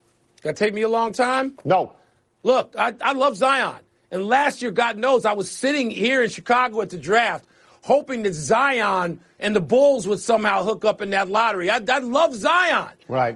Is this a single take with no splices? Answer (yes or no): yes